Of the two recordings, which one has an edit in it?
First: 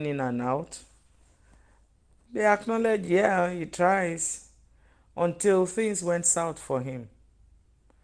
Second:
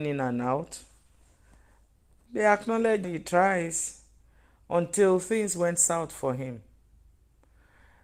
second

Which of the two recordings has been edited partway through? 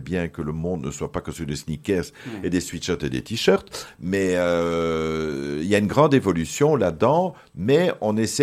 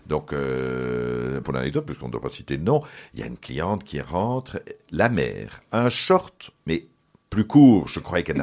second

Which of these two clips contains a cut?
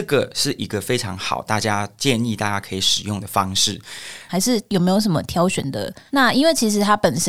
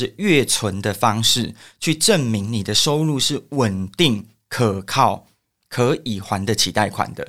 first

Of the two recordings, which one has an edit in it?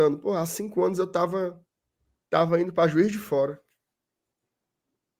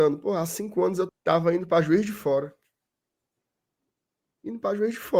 second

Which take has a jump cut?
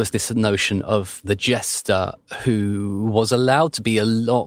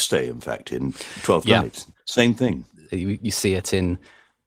second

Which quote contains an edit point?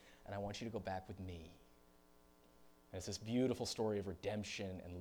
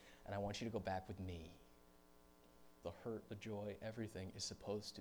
second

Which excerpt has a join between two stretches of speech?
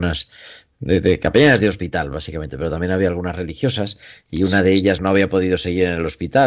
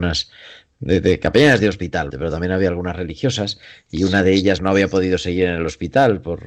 second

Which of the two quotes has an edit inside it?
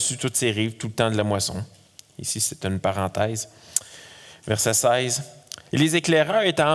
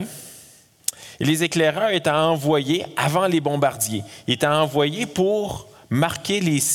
first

